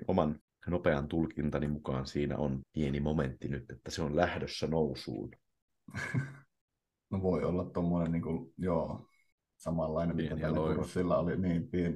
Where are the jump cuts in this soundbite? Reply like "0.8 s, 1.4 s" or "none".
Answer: 2.6 s